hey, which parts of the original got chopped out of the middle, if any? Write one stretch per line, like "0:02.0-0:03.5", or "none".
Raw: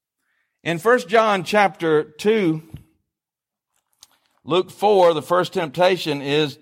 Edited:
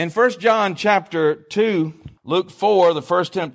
0:02.9-0:04.4